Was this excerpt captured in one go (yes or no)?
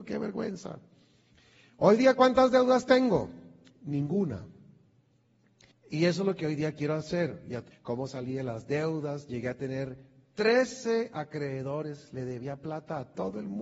no